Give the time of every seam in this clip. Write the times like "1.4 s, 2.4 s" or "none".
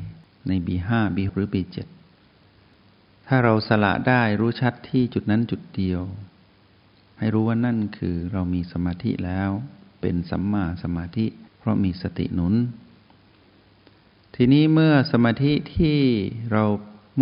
1.3 s, 11.5 s